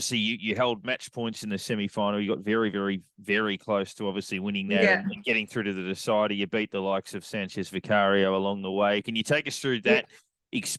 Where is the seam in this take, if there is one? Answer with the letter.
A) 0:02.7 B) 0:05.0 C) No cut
C